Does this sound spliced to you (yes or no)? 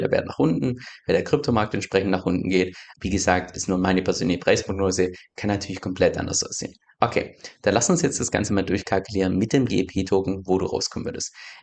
yes